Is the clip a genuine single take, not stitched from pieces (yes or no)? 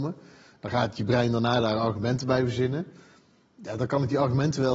yes